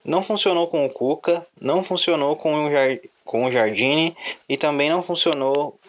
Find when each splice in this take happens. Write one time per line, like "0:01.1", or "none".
none